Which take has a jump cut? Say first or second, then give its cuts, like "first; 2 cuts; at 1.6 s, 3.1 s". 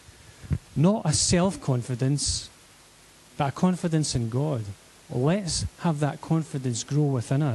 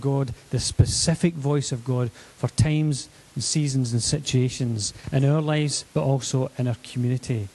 second; 1 cut; at 5.8 s